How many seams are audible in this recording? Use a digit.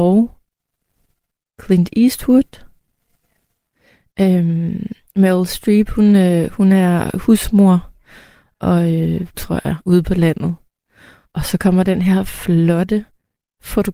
2